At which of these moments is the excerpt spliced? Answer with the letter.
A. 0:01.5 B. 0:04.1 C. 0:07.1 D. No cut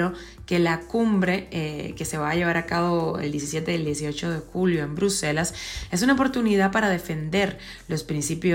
D